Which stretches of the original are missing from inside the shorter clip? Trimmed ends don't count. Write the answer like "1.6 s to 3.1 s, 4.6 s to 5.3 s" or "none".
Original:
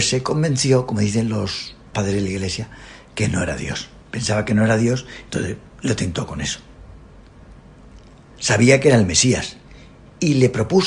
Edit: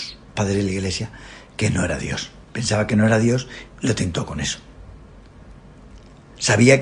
5.2 s to 5.7 s